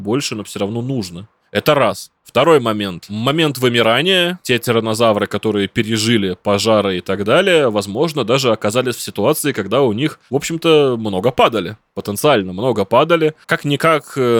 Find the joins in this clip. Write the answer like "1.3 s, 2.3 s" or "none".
13.4 s